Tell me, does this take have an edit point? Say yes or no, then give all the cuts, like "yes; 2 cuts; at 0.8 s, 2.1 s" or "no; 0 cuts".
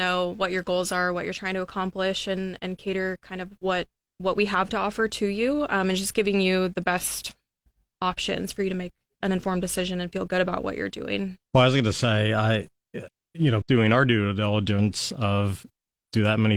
yes; 2 cuts; at 11.4 s, 13.6 s